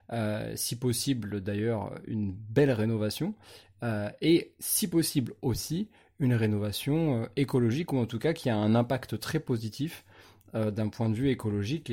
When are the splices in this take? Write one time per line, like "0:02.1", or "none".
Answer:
none